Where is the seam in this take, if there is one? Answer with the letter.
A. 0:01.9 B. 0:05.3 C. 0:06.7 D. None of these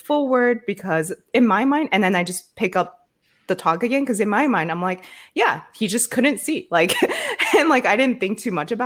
D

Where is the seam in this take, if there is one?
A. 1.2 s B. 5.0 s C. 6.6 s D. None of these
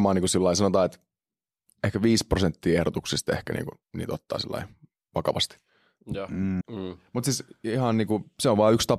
C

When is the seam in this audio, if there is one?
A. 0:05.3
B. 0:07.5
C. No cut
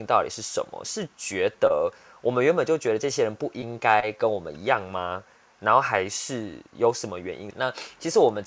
B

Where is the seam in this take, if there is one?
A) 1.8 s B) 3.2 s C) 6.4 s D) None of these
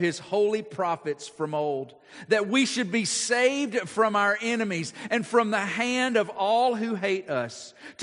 D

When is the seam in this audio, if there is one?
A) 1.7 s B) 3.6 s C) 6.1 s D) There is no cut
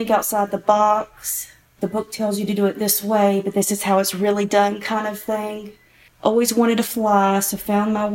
C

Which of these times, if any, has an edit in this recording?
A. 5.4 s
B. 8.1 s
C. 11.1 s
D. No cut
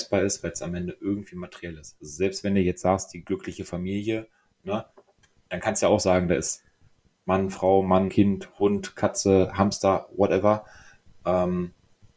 B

